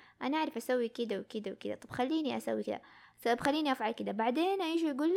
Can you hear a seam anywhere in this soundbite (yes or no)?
no